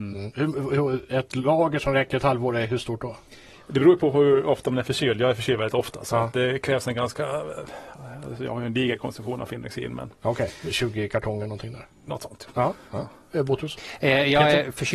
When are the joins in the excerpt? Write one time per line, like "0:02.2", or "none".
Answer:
none